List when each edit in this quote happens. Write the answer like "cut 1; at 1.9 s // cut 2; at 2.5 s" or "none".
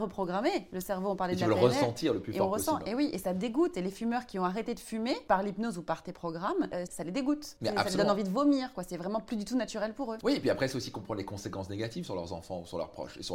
cut 1; at 6.9 s